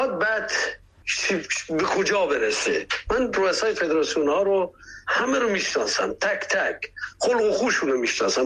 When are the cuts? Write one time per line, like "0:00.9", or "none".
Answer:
none